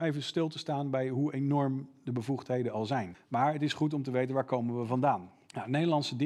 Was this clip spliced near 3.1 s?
yes; 1 cut; at 3.1 s

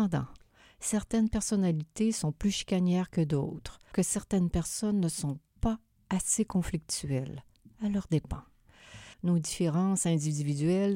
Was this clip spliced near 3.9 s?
yes; 2 cuts; at 3.9 s, 9.1 s

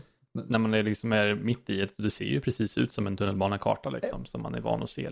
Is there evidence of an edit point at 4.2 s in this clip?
no; 0 cuts

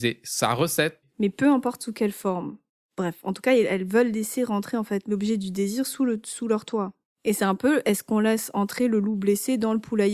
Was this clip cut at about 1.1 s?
yes; 1 cut; at 1.1 s

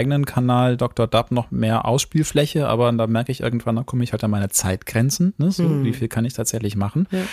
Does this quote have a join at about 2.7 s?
no; 0 cuts

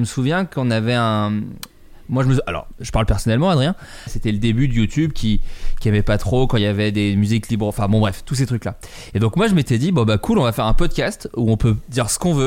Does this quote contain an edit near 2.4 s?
no; 1 cut; at 4.1 s

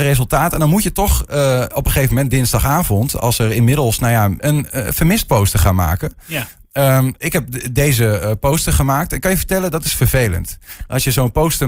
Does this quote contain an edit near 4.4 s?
yes; 1 cut; at 4.4 s

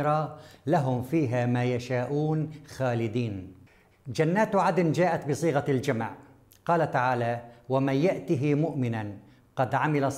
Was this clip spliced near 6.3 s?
no; 1 cut; at 3.9 s

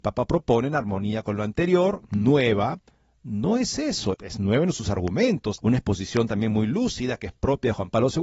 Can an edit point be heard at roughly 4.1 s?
yes; 2 cuts; at 4.1 s, 5.6 s

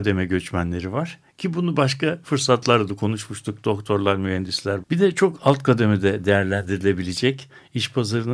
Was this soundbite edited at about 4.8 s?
yes; 1 cut; at 4.8 s

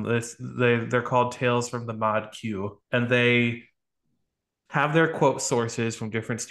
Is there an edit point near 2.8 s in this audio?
yes; 1 cut; at 2.8 s

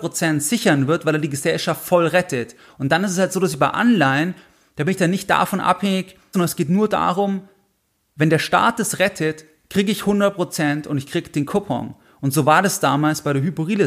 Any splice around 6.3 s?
yes; 1 cut; at 6.3 s

